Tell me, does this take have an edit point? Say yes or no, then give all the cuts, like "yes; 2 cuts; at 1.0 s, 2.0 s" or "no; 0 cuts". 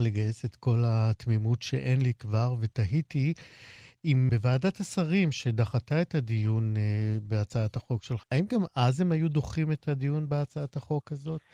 yes; 2 cuts; at 4.3 s, 8.2 s